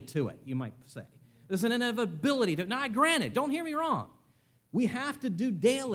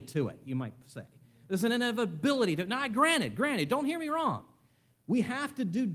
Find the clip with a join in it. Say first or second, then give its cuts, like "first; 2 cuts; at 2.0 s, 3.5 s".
first; 1 cut; at 3.3 s